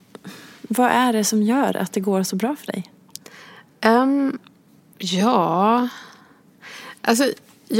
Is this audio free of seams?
yes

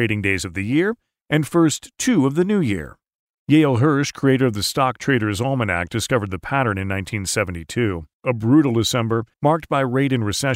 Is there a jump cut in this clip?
yes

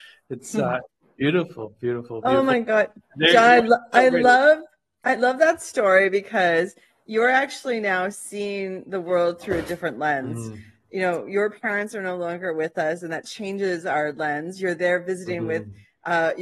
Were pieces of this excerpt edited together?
no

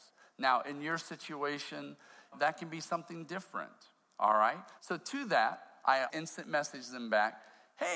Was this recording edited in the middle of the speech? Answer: yes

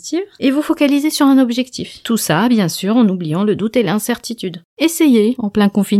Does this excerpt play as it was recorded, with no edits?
yes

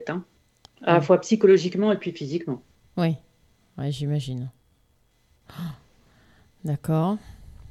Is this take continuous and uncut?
yes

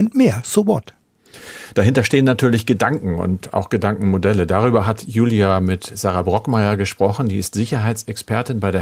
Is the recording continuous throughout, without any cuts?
yes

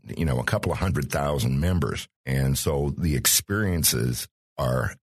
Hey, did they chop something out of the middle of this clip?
yes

